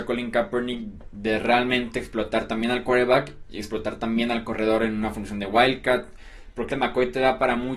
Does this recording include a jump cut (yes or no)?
yes